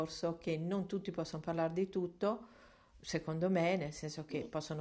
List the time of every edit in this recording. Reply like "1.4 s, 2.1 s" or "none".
none

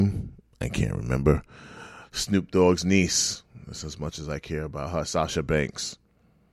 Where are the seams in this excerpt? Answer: none

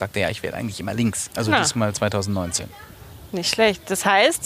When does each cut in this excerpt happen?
1.3 s

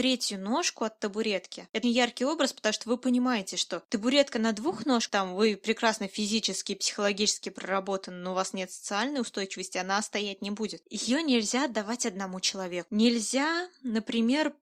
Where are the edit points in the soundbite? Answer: 1.8 s, 10.8 s

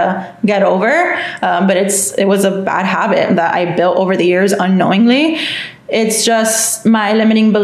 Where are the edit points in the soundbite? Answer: none

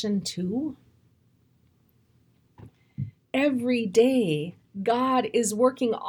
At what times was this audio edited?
3.2 s

